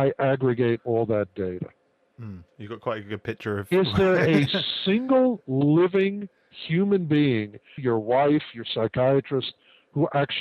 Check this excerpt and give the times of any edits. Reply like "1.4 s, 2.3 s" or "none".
7.8 s